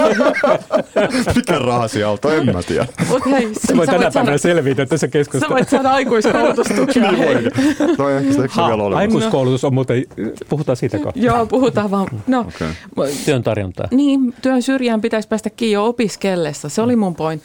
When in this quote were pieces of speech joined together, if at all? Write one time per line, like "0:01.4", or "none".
0:08.0
0:13.3